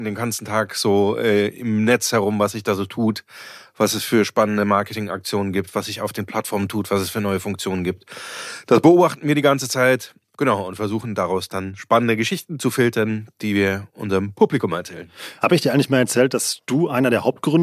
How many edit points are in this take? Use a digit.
0